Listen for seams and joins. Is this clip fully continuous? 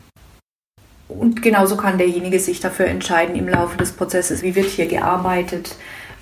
no; 1 cut; at 4.4 s

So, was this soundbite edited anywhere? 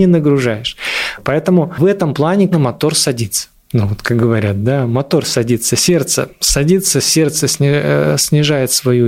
yes; 1 cut; at 2.5 s

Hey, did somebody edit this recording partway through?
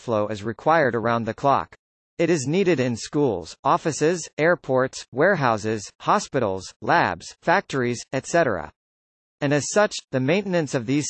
no; 0 cuts

